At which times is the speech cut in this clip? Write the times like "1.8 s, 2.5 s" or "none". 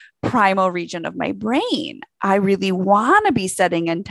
none